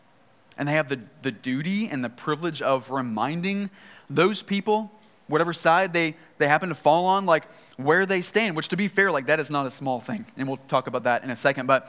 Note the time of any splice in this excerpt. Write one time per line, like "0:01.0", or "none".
none